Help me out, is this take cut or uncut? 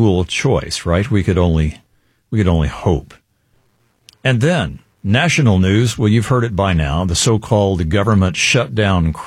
uncut